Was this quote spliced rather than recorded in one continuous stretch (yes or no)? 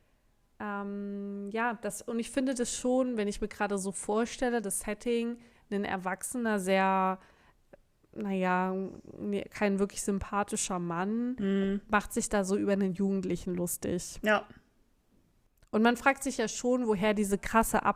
no